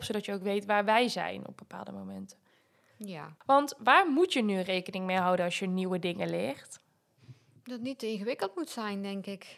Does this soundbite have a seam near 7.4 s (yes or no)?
no